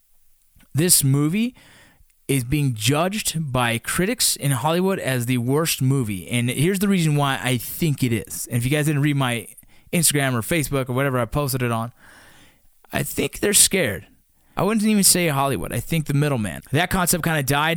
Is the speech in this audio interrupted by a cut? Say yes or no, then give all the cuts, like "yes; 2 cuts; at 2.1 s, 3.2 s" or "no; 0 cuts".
yes; 2 cuts; at 14.6 s, 16.6 s